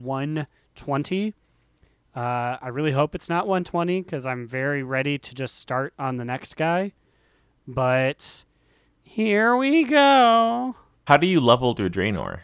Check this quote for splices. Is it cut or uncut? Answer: uncut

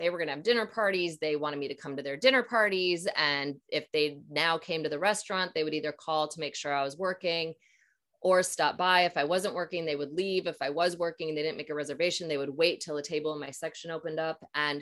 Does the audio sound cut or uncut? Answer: uncut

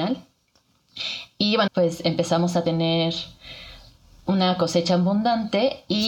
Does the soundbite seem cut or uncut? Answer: cut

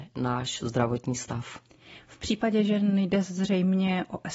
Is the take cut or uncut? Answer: uncut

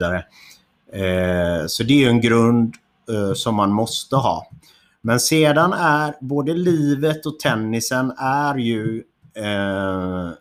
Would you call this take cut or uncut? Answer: uncut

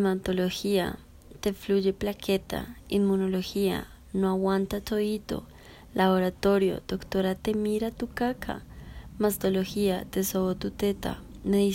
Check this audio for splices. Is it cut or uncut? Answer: uncut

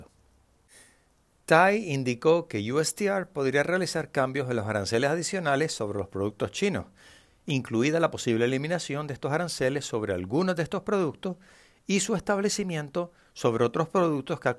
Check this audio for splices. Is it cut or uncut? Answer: uncut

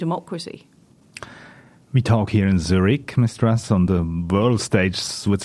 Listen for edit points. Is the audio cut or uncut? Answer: uncut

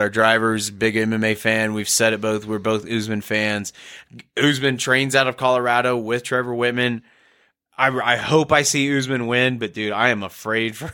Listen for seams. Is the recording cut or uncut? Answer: uncut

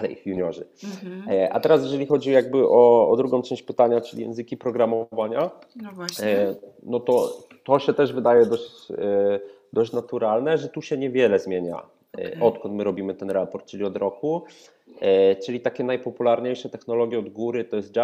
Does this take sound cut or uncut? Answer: uncut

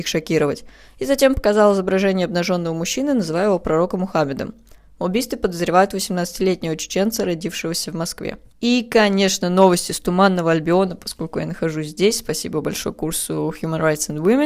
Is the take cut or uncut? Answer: uncut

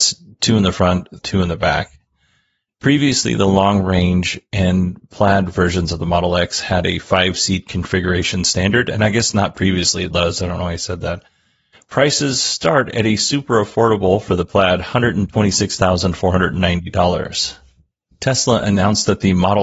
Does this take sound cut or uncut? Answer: cut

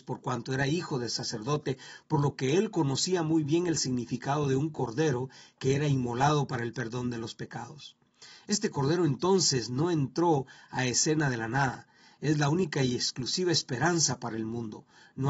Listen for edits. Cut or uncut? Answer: uncut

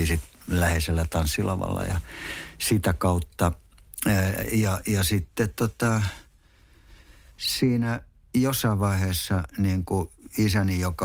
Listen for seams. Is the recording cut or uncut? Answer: uncut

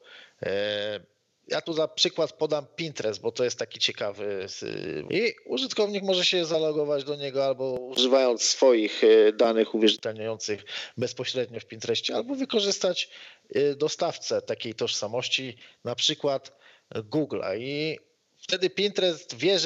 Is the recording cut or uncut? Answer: cut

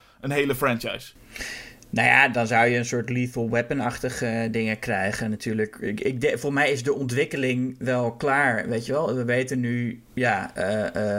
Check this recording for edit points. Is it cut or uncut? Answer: cut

